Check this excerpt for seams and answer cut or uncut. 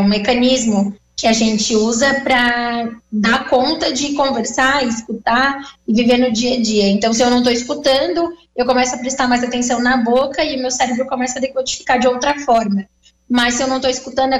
uncut